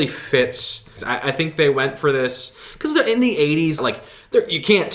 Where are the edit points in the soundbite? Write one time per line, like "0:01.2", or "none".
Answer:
0:01.0
0:03.8